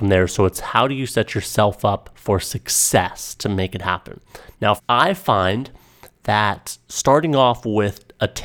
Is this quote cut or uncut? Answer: cut